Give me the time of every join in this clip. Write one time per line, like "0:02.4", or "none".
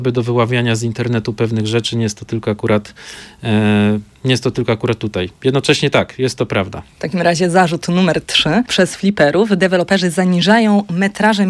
none

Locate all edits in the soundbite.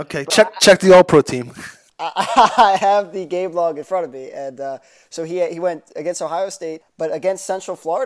0:06.8

